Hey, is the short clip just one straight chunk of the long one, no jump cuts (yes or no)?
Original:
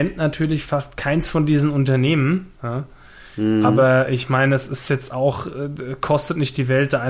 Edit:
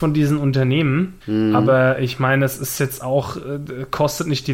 no